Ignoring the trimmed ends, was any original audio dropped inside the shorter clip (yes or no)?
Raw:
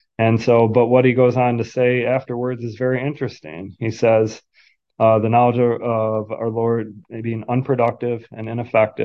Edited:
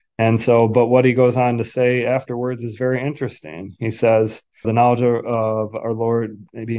yes